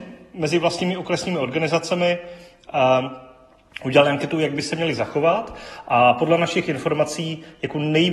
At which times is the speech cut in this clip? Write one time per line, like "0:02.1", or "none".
none